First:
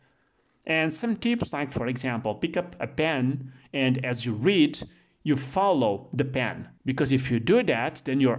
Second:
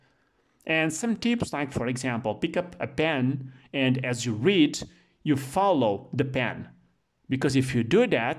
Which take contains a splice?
first; 1 cut; at 6.8 s

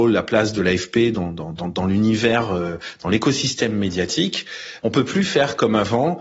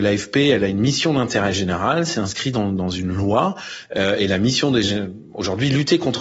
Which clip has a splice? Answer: first; 1 cut; at 4.8 s

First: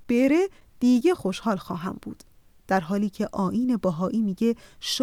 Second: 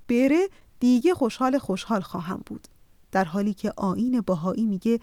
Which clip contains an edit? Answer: first; 1 cut; at 1.1 s

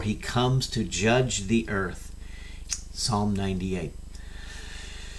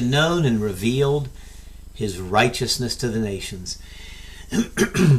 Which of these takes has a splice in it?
first; 1 cut; at 2.6 s

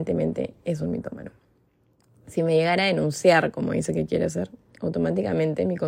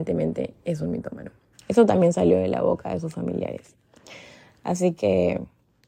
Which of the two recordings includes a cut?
second; 1 cut; at 1.5 s

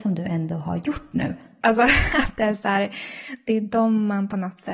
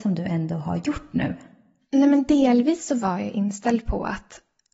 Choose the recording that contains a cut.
first; 1 cut; at 1.6 s

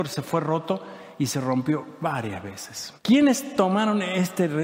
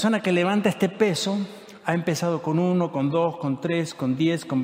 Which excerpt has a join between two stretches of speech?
first; 1 cut; at 3.0 s

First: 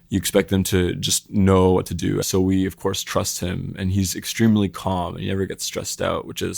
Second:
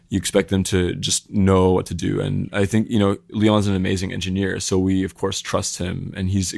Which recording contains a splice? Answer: first; 1 cut; at 2.2 s

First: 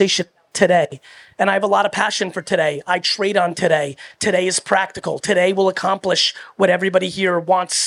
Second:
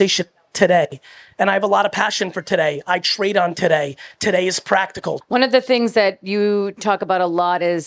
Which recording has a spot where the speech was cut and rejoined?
second; 1 cut; at 5.2 s

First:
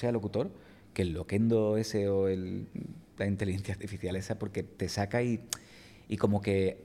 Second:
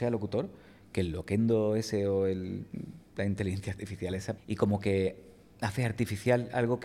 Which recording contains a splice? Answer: second; 1 cut; at 4.4 s

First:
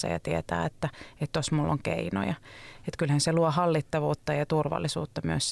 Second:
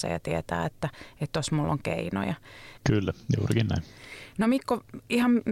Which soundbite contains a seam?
second; 1 cut; at 2.8 s

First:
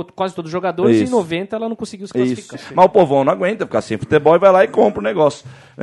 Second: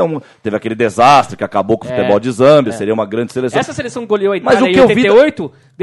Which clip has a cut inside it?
first; 1 cut; at 2.5 s

